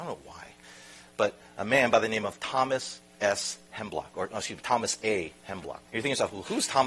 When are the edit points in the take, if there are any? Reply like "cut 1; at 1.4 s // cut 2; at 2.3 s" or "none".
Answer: cut 1; at 5.9 s

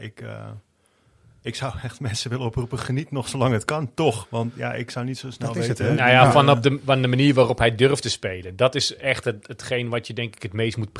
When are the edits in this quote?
none

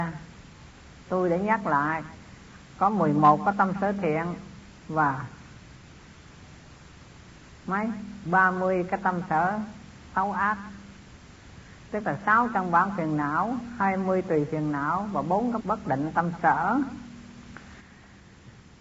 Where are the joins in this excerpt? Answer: cut 1; at 15.6 s

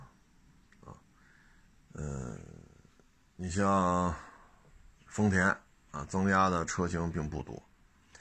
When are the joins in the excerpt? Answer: cut 1; at 1.9 s

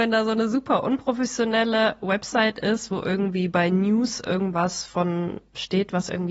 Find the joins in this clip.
none

